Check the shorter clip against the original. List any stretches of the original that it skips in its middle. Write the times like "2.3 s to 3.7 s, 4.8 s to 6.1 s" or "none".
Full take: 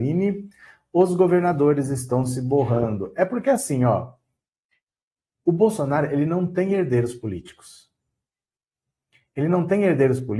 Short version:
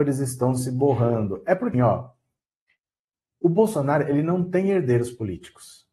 3.4 s to 3.8 s